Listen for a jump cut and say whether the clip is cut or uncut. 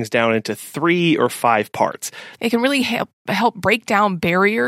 cut